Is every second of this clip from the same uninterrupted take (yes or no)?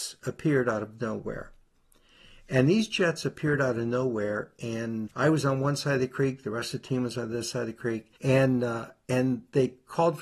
no